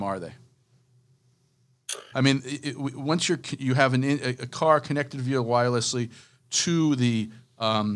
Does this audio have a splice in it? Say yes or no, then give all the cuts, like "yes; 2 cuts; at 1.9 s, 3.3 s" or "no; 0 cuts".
yes; 1 cut; at 2.1 s